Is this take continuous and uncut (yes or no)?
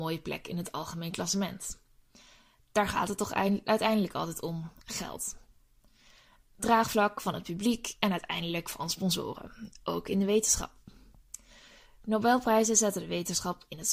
yes